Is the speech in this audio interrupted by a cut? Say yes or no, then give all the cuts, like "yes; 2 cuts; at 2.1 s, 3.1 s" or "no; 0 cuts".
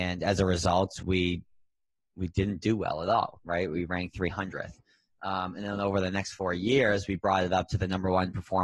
no; 0 cuts